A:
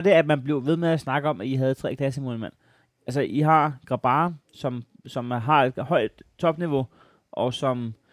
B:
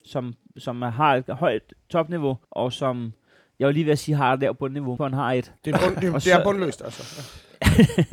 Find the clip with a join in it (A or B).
B